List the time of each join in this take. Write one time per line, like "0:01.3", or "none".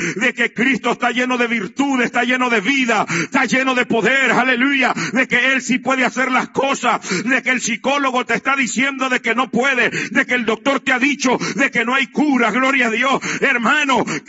none